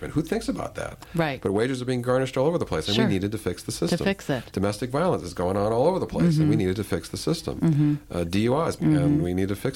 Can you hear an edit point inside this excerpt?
yes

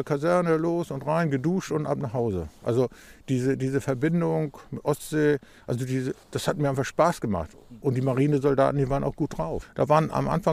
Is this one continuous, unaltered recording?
no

